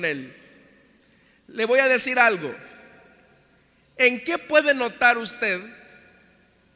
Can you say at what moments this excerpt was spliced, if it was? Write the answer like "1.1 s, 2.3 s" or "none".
none